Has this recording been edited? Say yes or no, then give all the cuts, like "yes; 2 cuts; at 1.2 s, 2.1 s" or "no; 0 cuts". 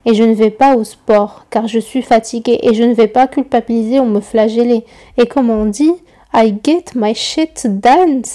yes; 1 cut; at 5.0 s